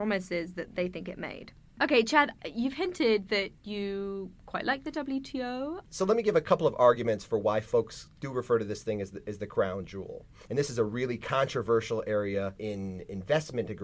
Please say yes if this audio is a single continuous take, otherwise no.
no